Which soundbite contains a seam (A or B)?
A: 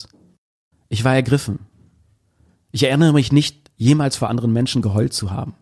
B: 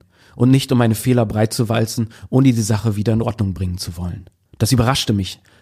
B